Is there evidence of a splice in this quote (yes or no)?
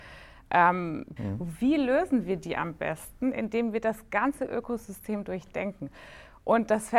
yes